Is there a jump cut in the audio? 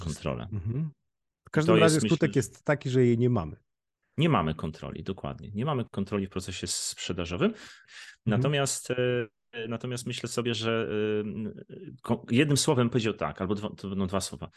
yes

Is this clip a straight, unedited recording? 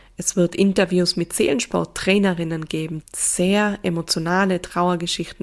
no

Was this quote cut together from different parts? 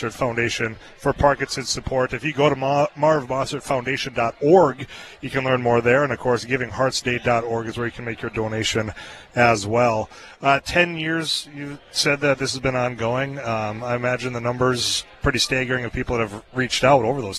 no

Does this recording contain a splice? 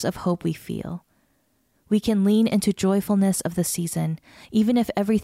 no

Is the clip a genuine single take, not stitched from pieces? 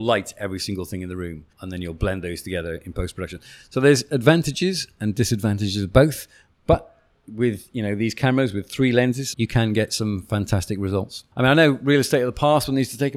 no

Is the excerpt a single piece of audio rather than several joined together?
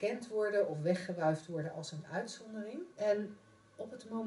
no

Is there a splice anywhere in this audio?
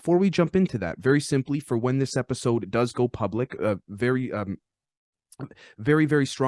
no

